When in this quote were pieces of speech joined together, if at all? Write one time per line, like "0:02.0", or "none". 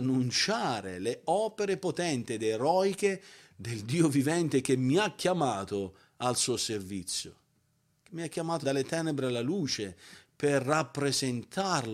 0:08.6